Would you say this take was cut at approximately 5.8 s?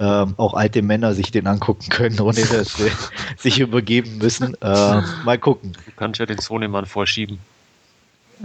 yes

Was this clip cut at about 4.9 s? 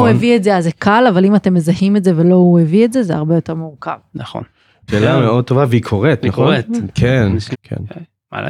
yes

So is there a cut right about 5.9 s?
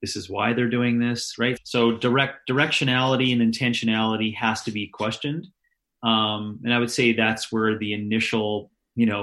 no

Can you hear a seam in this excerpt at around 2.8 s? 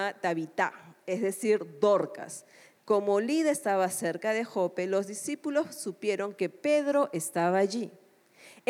yes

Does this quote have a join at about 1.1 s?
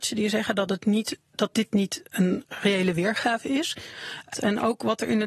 no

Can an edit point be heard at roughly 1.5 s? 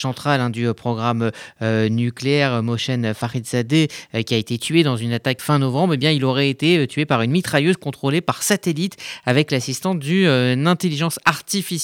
no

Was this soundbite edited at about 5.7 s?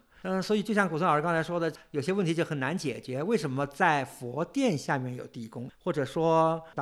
yes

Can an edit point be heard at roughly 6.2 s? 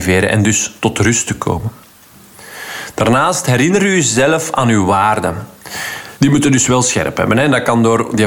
yes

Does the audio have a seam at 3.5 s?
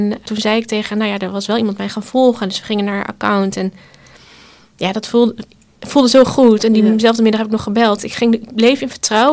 no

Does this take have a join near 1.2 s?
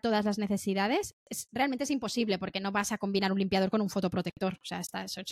yes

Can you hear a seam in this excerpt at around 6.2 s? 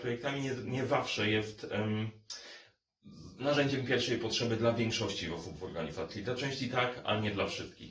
no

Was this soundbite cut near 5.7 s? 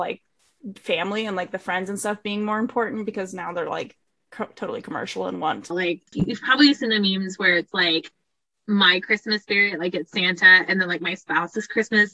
yes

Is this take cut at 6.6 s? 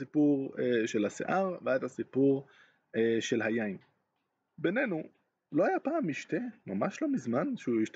no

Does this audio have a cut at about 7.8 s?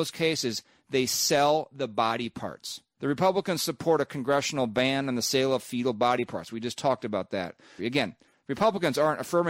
yes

